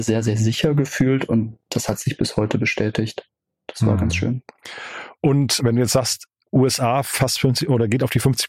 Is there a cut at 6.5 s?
no; 0 cuts

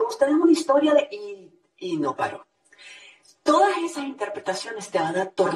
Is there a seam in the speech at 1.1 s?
no; 0 cuts

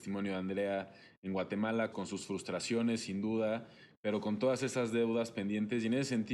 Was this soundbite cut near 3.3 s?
no; 1 cut; at 1.9 s

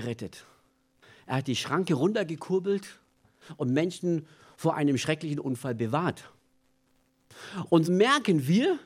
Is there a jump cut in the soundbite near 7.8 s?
yes; 1 cut; at 7.8 s

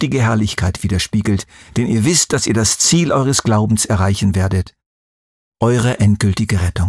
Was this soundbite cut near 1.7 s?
no; 0 cuts

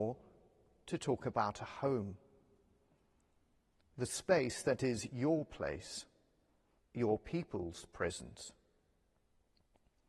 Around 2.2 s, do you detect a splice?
no; 1 cut; at 6.8 s

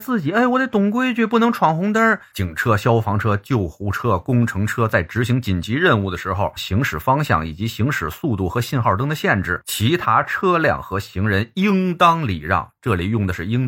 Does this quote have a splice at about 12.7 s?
no; 2 cuts; at 2.3 s, 6.6 s

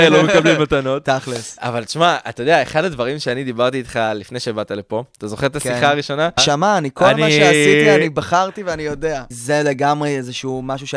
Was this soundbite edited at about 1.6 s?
no; 2 cuts; at 6.4 s, 9.3 s

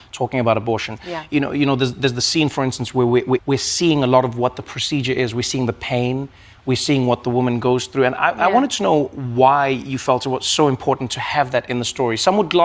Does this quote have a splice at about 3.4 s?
yes; 1 cut; at 3.4 s

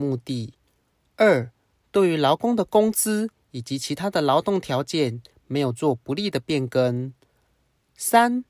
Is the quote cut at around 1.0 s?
no; 0 cuts

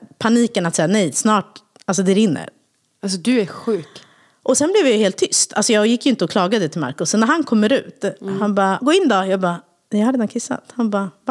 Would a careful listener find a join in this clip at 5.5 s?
no; 1 cut; at 8.8 s

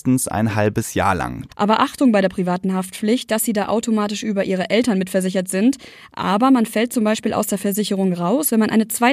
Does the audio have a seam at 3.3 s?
yes; 2 cuts; at 1.5 s, 3.3 s

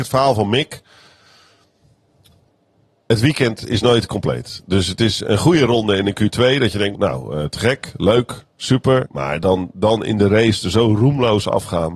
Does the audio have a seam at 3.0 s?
no; 2 cuts; at 6.9 s, 9.0 s

